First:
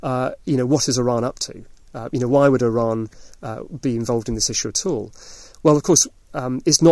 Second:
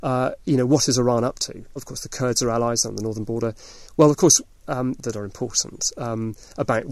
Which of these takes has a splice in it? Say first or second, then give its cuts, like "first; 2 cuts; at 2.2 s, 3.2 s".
second; 3 cuts; at 1.8 s, 3.9 s, 5.0 s